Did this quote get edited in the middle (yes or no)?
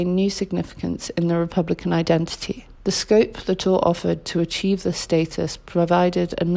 yes